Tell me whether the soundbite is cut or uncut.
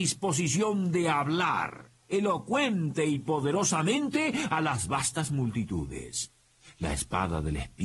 uncut